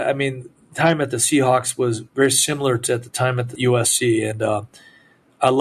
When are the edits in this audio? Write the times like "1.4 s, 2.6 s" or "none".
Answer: none